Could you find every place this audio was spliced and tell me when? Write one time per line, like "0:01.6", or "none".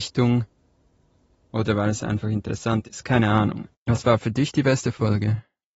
0:01.4
0:03.7

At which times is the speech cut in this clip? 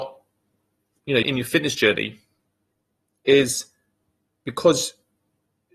0:01.2

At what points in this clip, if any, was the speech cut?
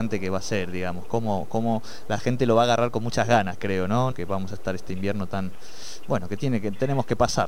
0:04.1

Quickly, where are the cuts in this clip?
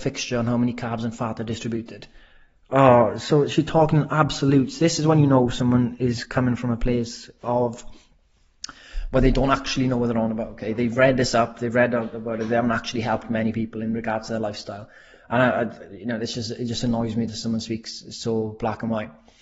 none

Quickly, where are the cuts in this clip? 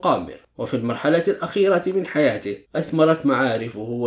0:02.6

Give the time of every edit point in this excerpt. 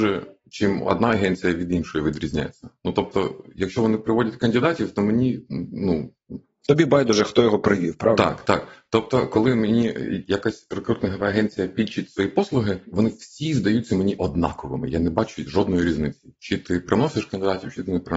none

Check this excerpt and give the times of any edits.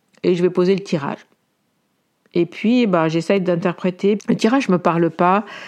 0:04.2

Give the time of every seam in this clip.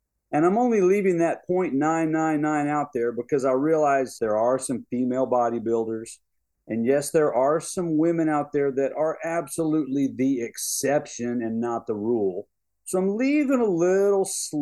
0:04.2

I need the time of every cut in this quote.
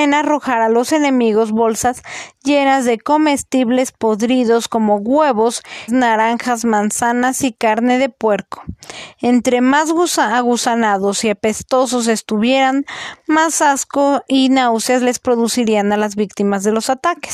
0:05.9

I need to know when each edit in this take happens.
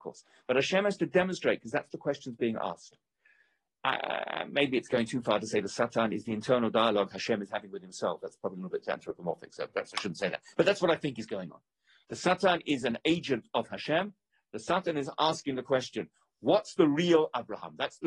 none

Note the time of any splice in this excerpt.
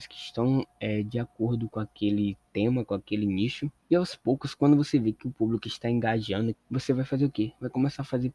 0:03.8
0:06.5

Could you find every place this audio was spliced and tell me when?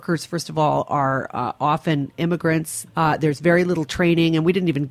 0:02.9

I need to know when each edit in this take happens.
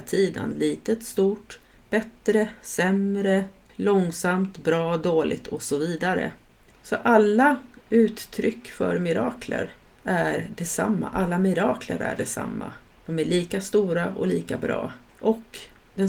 0:03.7
0:06.7

